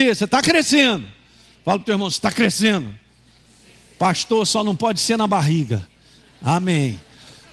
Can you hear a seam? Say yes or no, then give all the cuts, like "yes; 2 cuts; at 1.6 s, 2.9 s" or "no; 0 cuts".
no; 0 cuts